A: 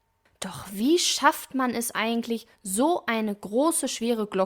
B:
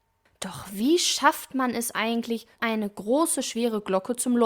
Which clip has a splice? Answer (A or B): B